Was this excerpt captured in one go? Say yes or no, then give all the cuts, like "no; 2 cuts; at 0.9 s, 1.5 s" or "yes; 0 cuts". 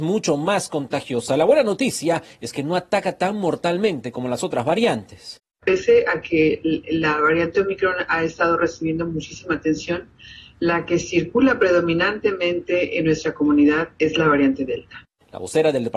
yes; 0 cuts